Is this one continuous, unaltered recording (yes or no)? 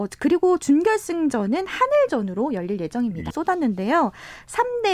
no